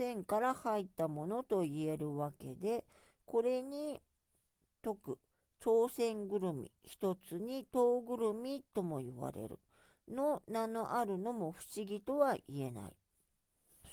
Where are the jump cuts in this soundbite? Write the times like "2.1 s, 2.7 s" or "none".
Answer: none